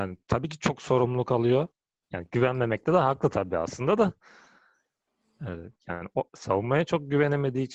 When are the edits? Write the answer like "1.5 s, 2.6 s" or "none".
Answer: 2.0 s